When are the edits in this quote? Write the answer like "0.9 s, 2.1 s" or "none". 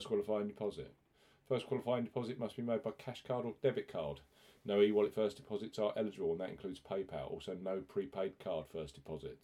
none

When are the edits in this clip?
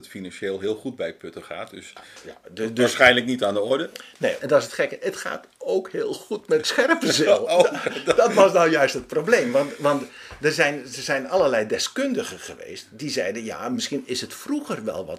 4.4 s

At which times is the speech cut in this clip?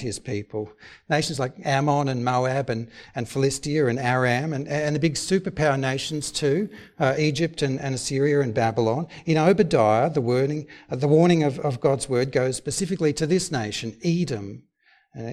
none

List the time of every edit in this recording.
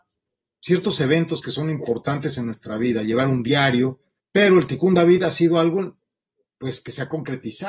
4.2 s

